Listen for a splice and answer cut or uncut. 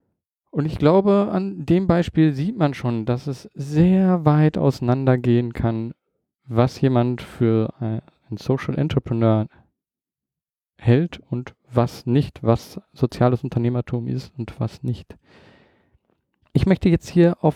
uncut